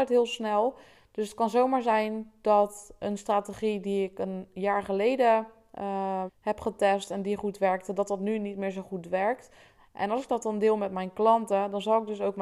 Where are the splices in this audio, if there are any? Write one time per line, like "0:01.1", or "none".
0:06.3